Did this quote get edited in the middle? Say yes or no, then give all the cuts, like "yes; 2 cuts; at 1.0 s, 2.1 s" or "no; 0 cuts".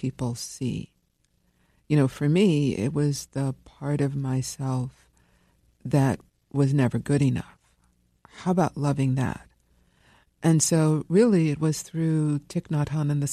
no; 0 cuts